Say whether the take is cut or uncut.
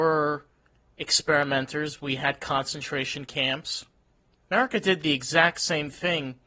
uncut